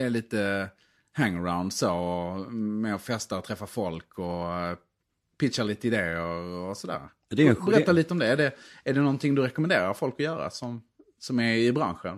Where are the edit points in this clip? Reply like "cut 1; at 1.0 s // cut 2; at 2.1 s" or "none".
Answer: none